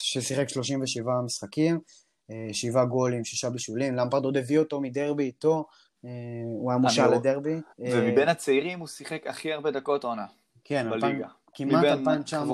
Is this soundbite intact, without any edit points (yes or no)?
no